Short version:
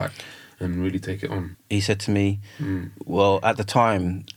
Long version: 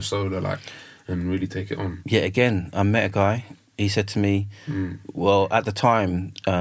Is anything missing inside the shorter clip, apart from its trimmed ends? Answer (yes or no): yes